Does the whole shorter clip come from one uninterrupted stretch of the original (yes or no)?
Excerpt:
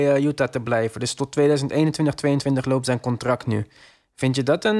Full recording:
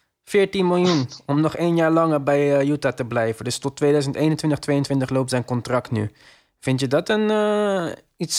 yes